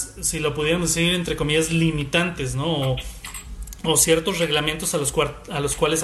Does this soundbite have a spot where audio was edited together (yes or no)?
no